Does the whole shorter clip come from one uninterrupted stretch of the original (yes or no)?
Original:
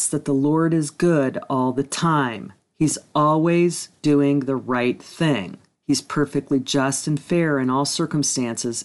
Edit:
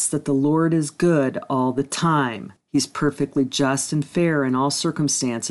no